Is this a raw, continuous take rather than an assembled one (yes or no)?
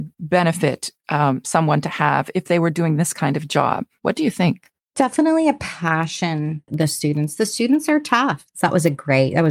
no